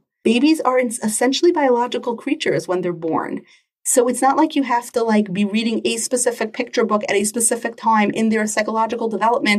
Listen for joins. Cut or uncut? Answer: uncut